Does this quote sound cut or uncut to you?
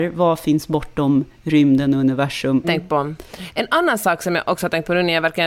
cut